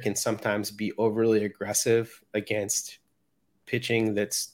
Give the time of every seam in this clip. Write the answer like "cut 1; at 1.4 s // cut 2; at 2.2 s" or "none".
none